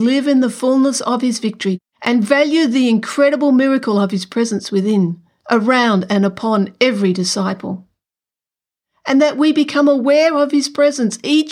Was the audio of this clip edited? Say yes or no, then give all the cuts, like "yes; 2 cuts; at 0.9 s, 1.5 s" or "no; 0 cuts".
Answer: no; 0 cuts